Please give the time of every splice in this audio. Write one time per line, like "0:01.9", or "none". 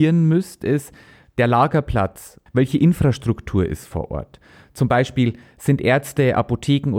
0:02.5